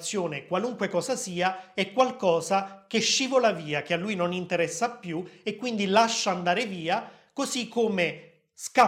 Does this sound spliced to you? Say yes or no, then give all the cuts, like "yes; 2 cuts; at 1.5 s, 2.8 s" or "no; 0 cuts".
no; 0 cuts